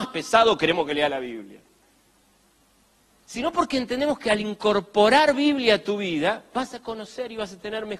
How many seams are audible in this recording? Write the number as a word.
zero